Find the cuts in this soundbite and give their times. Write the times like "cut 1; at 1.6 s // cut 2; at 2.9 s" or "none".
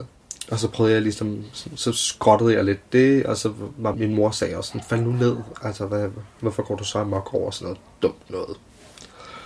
cut 1; at 3.9 s